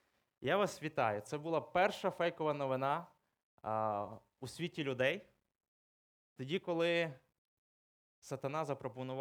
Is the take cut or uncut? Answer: uncut